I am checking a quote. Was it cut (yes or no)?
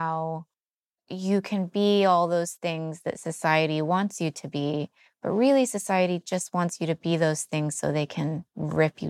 no